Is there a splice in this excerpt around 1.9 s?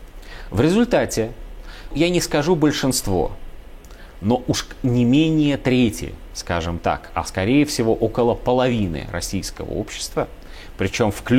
yes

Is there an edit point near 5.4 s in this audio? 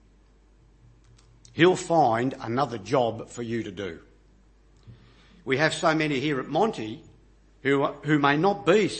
no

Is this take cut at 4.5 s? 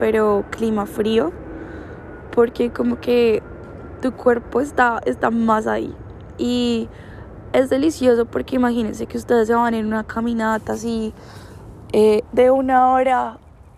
no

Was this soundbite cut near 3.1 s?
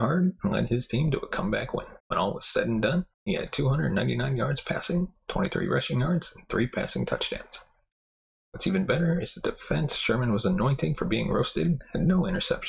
yes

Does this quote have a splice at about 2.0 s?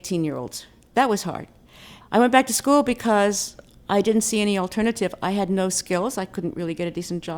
yes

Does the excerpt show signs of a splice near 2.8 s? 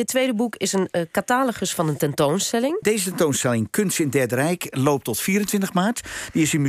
yes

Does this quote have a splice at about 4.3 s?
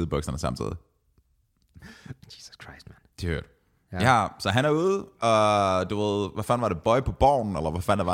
no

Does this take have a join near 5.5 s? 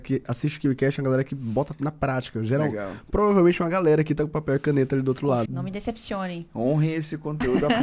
yes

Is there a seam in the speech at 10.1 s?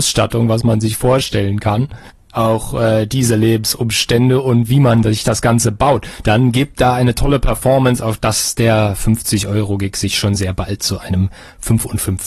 no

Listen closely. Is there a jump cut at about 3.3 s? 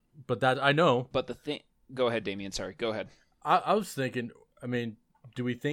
no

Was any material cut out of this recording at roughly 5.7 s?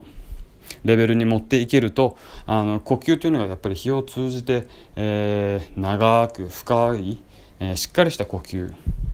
no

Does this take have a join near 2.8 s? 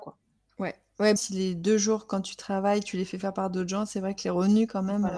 no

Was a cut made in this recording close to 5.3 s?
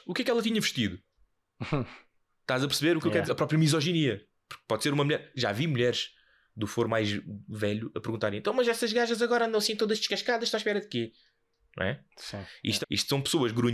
no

